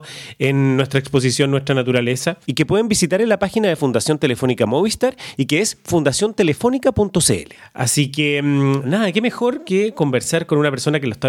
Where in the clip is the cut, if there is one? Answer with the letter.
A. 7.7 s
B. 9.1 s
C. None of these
C